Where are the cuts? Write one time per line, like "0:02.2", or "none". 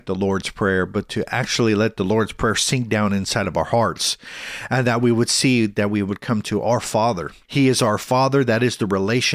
0:07.4

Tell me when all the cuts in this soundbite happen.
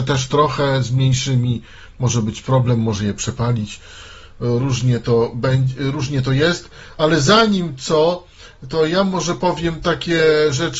none

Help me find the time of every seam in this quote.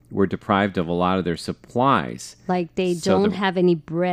none

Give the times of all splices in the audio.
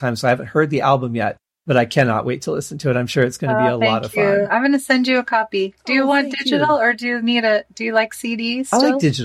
none

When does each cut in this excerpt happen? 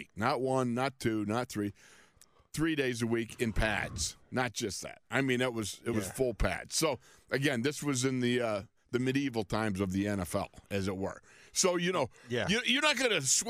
none

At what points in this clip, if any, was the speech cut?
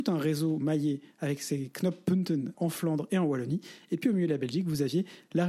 0:02.5

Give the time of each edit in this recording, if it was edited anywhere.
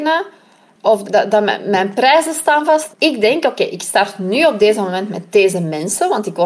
0:01.0
0:02.9

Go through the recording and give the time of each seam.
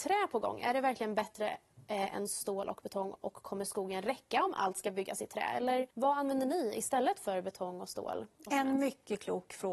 0:05.9

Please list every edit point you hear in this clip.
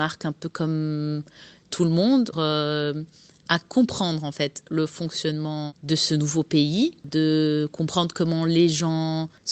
0:02.3

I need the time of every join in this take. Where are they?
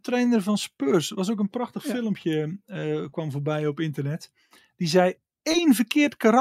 none

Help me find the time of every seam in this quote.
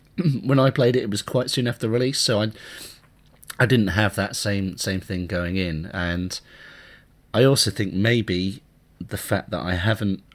none

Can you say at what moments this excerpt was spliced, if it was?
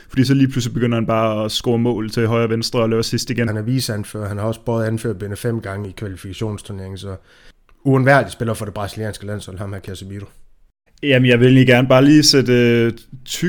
0:03.5
0:10.9

